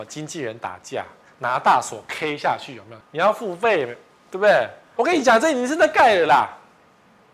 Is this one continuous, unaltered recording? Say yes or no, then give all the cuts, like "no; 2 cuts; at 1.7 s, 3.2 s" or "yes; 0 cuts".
no; 2 cuts; at 3.0 s, 5.0 s